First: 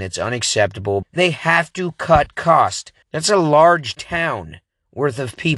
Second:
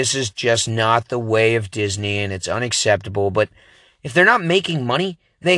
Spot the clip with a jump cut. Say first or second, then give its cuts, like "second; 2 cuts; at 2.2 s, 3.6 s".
first; 2 cuts; at 1.0 s, 3.0 s